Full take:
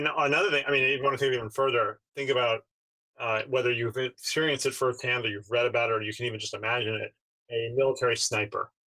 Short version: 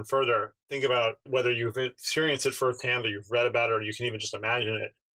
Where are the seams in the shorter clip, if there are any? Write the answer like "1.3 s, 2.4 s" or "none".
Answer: 1.3 s